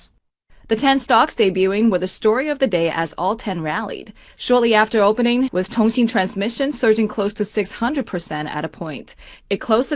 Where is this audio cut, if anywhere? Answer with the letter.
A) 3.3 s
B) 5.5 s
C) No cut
B